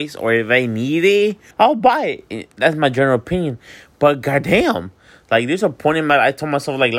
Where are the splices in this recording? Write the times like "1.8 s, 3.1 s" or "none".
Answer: 1.5 s

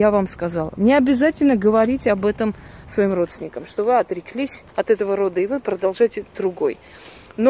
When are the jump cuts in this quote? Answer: 4.7 s

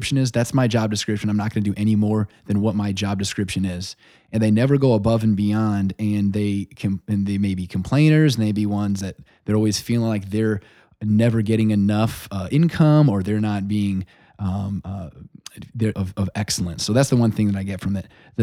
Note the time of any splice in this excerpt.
15.9 s

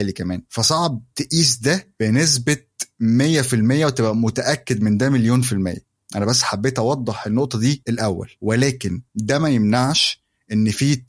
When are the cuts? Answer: 9.1 s

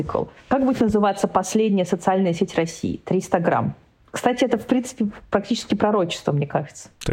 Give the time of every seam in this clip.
none

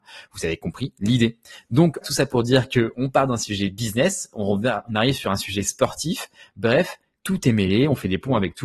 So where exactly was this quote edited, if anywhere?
2.0 s

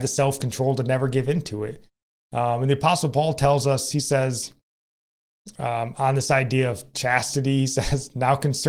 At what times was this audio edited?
none

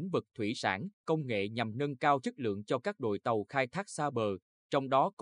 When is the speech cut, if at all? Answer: 0.9 s

